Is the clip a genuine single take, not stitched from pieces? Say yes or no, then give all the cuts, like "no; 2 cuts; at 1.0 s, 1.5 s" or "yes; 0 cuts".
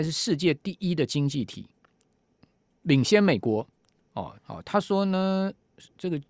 no; 1 cut; at 4.4 s